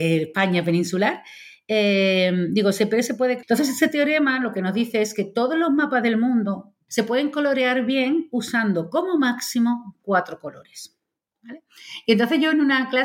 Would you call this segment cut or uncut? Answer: cut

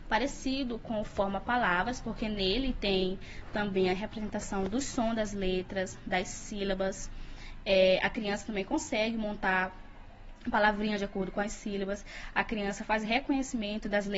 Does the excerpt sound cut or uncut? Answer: uncut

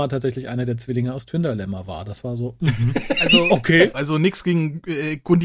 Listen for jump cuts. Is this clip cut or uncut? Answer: cut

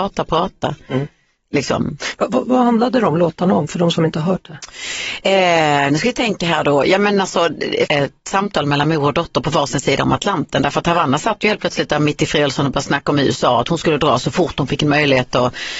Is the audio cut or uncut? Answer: cut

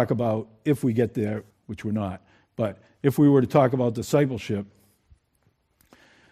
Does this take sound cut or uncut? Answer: cut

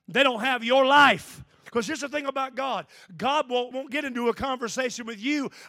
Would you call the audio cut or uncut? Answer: cut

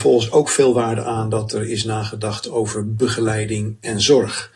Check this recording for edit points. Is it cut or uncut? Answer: uncut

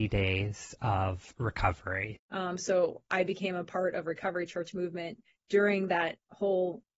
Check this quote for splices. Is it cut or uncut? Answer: cut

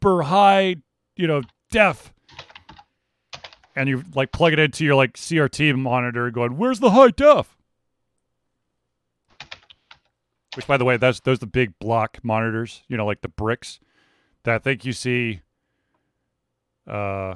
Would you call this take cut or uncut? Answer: uncut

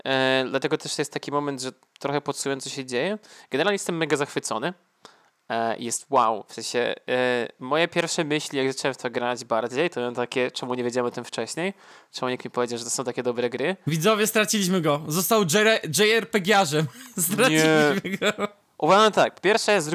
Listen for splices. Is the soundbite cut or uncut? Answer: uncut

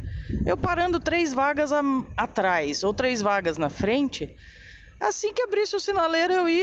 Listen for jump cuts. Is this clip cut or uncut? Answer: uncut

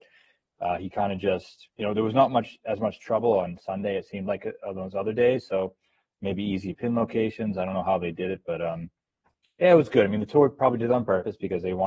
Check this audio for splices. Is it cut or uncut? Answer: cut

